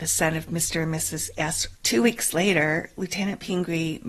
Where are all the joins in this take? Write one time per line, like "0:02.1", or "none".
0:01.7